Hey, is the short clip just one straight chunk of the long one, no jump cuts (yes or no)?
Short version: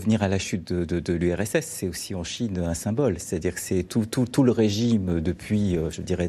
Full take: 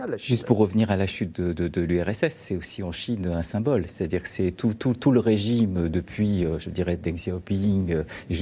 yes